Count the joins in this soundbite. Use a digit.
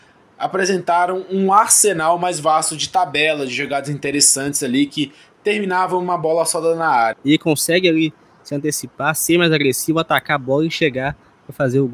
1